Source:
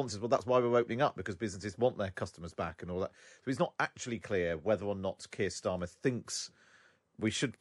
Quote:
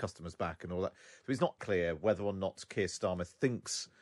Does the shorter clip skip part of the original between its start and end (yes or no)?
yes